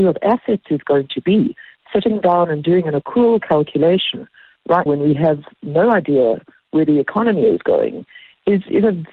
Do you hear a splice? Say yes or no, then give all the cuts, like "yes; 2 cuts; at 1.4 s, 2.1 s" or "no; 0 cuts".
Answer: yes; 1 cut; at 4.9 s